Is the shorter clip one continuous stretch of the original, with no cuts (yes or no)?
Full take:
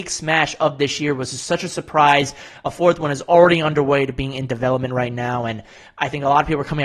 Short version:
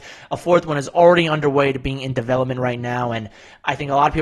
yes